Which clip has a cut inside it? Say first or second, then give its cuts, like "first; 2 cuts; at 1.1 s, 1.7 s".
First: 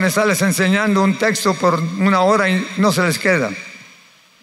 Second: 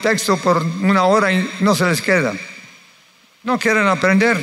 second; 1 cut; at 3.3 s